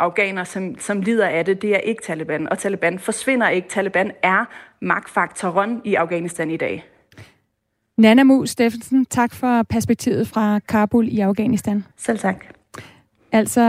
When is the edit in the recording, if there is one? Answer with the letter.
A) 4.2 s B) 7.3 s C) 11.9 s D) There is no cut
C